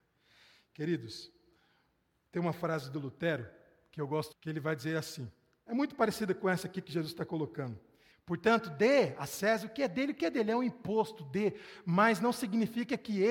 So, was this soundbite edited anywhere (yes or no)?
yes